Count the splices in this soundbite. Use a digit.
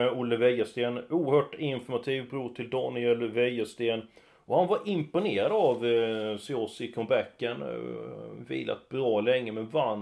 0